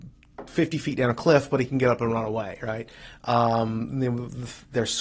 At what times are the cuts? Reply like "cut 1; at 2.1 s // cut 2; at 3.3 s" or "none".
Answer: none